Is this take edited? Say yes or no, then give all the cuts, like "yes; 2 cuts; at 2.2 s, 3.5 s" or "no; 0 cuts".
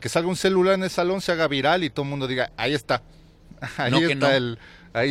no; 0 cuts